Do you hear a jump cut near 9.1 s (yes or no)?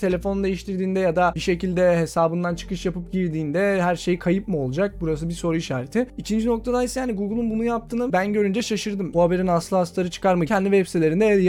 yes